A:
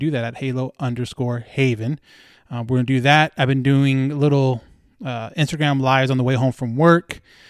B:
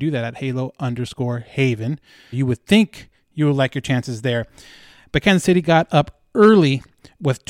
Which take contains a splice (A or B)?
B